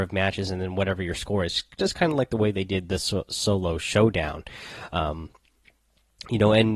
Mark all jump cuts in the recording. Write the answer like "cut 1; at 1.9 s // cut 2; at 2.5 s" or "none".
none